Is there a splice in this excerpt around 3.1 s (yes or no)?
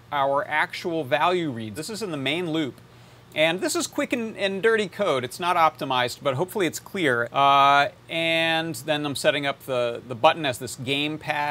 no